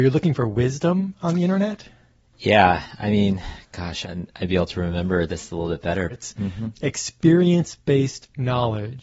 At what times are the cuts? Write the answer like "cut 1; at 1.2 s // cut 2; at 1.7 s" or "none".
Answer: cut 1; at 4.0 s // cut 2; at 6.1 s